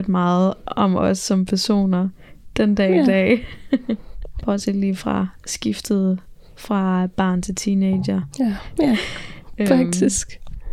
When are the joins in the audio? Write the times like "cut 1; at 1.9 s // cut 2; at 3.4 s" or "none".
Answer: cut 1; at 4.4 s // cut 2; at 8.8 s